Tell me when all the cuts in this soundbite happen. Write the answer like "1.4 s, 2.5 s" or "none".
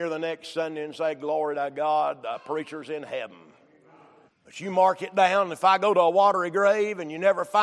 4.3 s